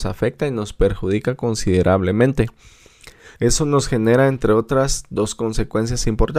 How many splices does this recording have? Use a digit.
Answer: 1